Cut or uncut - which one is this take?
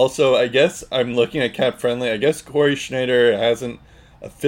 uncut